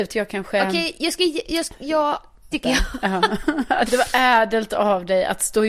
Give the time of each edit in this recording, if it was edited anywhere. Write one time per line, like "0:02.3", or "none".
0:02.5
0:03.9